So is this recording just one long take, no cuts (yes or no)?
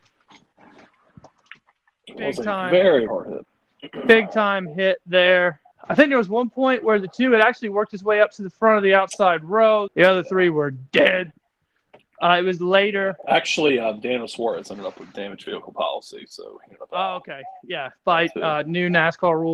no